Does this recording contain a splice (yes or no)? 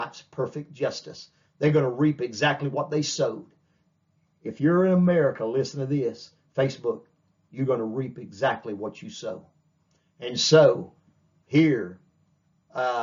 no